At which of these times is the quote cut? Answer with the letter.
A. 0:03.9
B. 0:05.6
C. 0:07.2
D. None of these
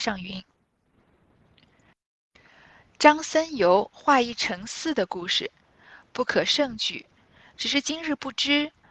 D